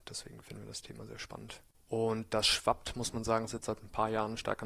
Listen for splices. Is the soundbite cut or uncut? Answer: cut